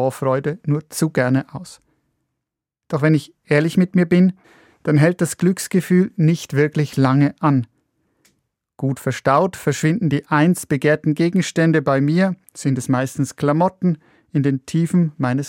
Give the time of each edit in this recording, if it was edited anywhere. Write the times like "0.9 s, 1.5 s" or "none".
none